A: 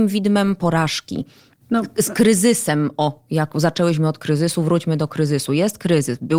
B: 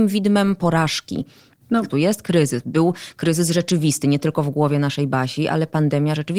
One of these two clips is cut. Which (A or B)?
B